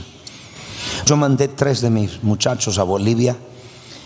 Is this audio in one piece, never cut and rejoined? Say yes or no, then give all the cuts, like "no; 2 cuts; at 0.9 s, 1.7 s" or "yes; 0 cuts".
yes; 0 cuts